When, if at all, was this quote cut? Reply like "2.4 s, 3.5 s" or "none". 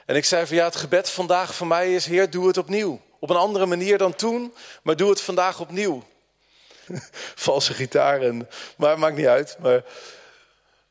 6.9 s